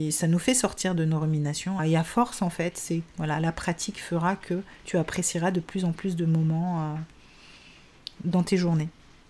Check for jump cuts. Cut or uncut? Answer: cut